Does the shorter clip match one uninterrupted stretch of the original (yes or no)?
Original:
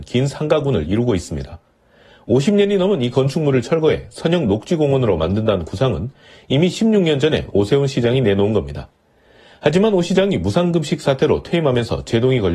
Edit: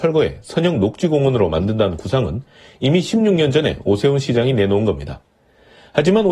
yes